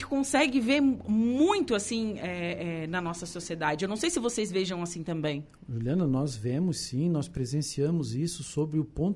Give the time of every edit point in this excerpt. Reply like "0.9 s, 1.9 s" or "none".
none